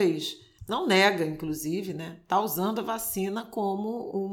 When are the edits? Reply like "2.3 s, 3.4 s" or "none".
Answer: none